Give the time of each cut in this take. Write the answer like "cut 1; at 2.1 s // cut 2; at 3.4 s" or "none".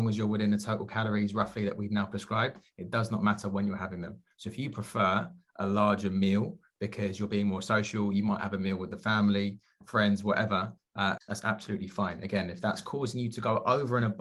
cut 1; at 11.2 s